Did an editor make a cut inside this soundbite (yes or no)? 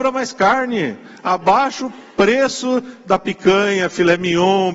no